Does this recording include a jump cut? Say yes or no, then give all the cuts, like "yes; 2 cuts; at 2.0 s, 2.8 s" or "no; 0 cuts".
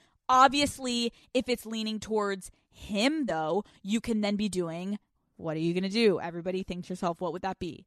no; 0 cuts